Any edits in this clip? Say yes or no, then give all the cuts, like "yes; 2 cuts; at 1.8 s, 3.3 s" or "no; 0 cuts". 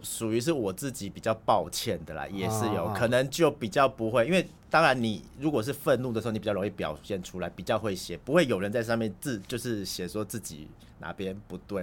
no; 0 cuts